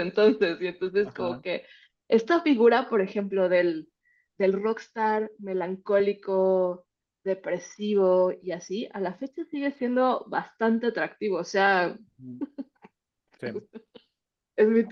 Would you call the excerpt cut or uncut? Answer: uncut